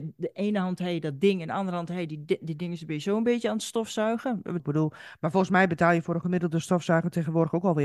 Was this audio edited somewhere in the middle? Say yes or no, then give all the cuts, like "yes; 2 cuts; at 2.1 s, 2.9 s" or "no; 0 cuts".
yes; 1 cut; at 4.6 s